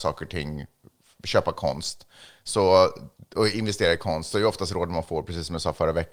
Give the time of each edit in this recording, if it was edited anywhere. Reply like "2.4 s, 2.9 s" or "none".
none